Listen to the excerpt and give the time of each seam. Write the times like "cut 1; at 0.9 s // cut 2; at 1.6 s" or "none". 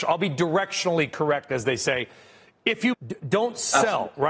cut 1; at 2.9 s